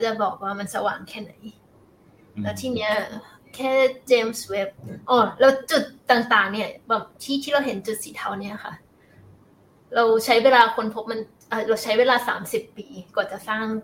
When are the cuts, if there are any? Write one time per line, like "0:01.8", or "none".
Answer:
none